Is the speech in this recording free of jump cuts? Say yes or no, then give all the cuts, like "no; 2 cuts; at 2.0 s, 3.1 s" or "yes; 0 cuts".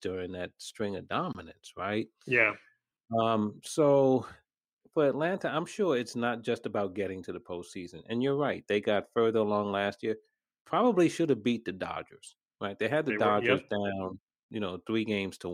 yes; 0 cuts